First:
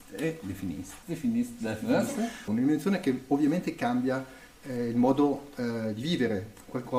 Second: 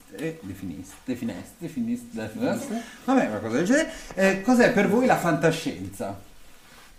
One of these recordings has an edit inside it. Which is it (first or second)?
first